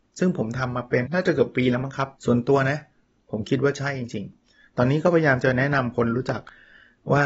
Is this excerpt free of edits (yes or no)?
no